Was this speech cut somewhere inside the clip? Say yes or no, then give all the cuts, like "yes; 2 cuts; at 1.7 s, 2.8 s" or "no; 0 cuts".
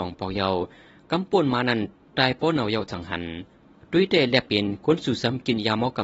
yes; 1 cut; at 2.1 s